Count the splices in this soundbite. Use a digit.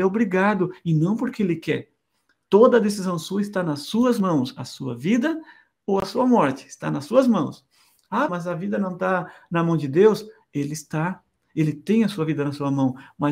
2